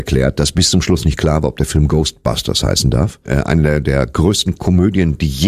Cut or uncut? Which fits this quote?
cut